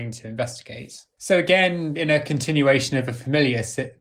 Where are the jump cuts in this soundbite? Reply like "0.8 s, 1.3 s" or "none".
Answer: 1.2 s